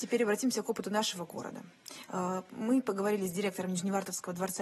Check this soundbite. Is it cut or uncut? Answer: uncut